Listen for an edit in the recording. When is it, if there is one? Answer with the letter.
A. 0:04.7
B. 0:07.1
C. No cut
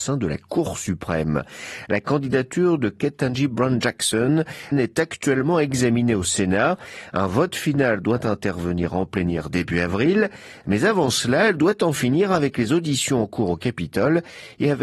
A